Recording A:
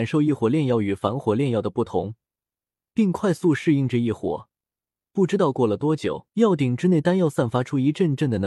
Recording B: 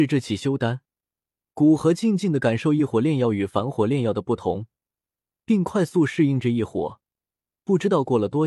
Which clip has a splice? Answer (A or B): A